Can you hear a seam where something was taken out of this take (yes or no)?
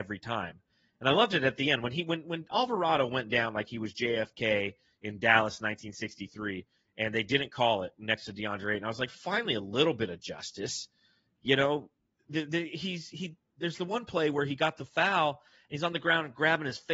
no